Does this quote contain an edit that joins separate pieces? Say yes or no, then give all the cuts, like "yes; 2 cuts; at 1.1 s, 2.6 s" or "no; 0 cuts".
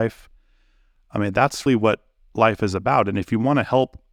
yes; 1 cut; at 1.7 s